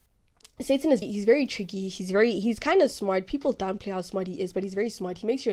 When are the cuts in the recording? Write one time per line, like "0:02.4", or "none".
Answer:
0:01.0